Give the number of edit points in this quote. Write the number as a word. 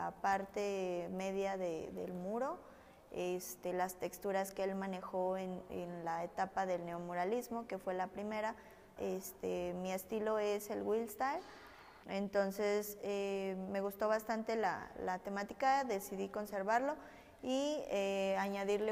two